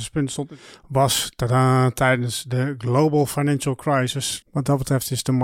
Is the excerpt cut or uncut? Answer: cut